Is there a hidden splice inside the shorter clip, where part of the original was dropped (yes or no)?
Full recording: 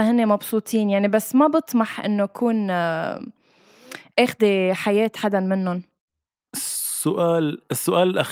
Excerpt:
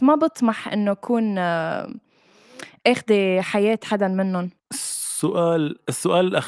yes